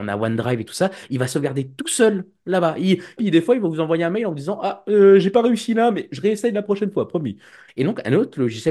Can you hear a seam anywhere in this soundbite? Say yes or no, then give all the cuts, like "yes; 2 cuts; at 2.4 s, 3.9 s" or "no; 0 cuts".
yes; 2 cuts; at 3.2 s, 7.7 s